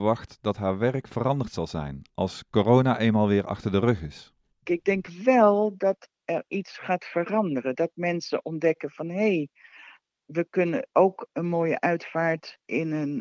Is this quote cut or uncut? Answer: uncut